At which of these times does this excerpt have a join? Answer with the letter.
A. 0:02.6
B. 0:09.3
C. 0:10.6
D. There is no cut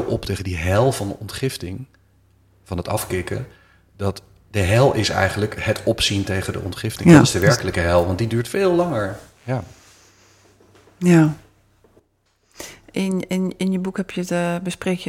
B